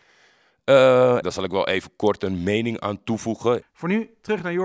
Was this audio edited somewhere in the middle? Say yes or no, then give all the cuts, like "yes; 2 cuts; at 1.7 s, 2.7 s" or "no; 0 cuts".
yes; 2 cuts; at 1.2 s, 3.6 s